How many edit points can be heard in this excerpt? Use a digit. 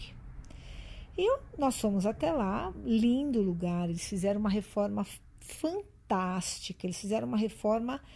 0